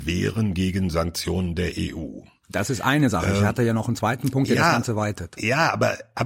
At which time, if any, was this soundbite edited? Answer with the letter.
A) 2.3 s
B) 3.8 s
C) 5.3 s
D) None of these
D